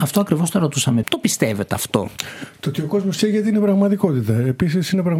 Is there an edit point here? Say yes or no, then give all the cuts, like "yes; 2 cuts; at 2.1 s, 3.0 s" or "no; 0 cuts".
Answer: yes; 1 cut; at 1.0 s